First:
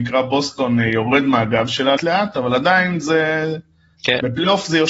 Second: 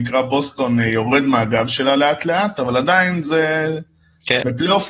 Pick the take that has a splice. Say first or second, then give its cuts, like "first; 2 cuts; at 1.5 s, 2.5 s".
first; 1 cut; at 2.0 s